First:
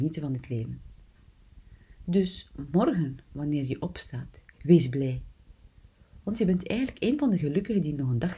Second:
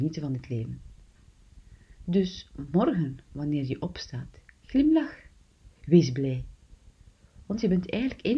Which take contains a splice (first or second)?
first